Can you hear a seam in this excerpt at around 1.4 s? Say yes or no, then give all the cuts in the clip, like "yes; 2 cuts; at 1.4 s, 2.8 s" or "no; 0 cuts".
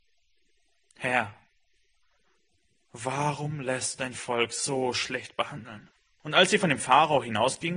no; 1 cut; at 6.2 s